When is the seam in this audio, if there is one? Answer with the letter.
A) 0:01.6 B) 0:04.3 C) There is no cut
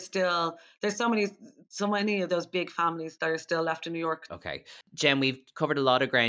B